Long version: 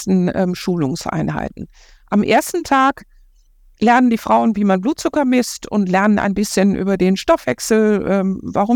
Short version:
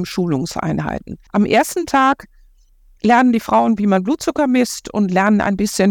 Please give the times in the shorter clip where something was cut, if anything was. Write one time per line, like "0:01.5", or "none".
0:01.3